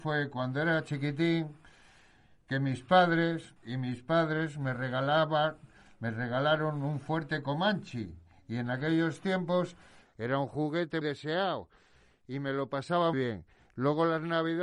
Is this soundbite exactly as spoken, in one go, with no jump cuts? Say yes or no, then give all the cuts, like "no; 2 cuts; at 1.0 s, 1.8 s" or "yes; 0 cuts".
no; 3 cuts; at 3.6 s, 11.0 s, 13.1 s